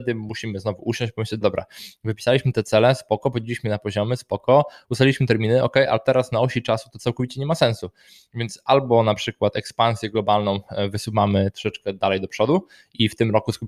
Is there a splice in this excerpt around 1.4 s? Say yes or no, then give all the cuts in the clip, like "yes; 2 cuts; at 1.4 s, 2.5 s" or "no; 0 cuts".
yes; 1 cut; at 1.4 s